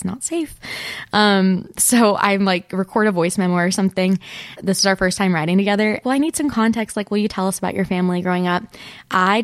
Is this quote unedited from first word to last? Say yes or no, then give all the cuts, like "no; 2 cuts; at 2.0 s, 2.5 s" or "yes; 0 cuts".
no; 2 cuts; at 4.6 s, 6.0 s